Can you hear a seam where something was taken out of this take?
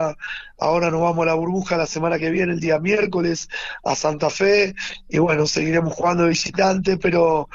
no; 0 cuts

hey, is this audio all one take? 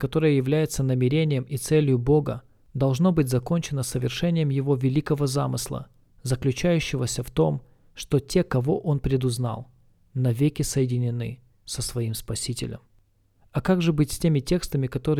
yes; 0 cuts

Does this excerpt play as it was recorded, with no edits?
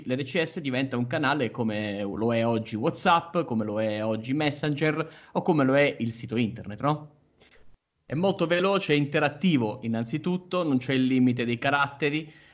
no; 1 cut; at 7.9 s

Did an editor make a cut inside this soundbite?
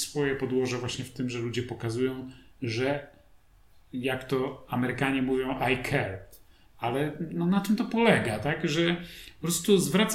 no; 0 cuts

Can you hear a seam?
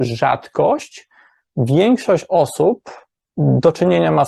no; 0 cuts

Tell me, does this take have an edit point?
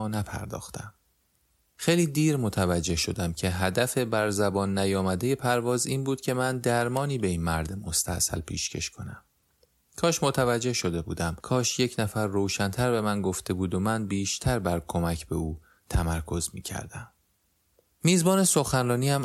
no; 0 cuts

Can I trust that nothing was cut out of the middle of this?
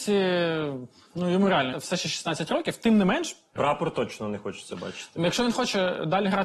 no; 2 cuts; at 1.7 s, 3.6 s

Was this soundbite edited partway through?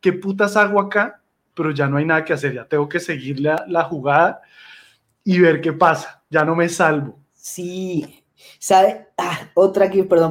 no; 0 cuts

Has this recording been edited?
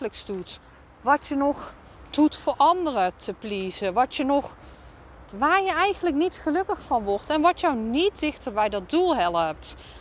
no; 0 cuts

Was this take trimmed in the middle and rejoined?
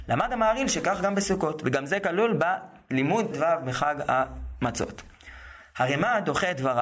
yes; 1 cut; at 3.3 s

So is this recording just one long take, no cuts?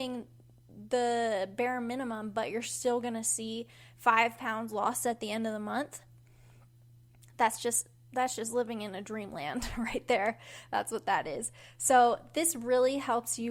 yes; 0 cuts

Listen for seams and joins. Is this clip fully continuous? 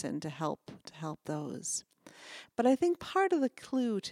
no; 1 cut; at 2.4 s

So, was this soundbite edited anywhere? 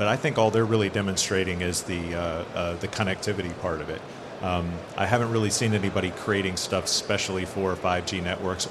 no; 0 cuts

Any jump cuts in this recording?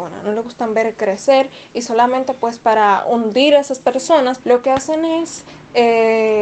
yes; 1 cut; at 4.4 s

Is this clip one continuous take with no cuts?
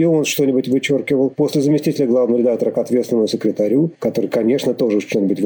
yes; 0 cuts

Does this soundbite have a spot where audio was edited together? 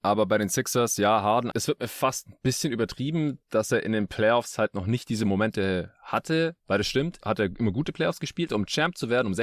yes; 3 cuts; at 1.5 s, 7.2 s, 8.5 s

